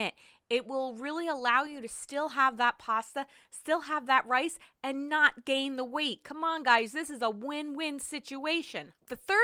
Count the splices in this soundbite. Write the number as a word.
zero